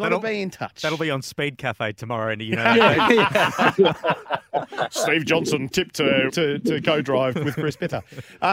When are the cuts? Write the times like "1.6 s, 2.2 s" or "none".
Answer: 6.3 s